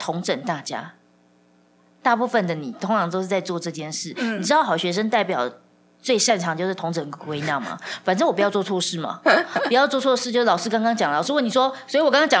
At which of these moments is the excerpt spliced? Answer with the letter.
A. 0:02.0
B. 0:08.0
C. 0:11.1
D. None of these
D